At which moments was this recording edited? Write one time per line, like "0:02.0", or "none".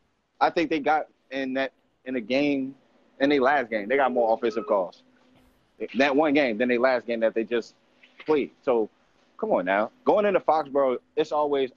0:05.9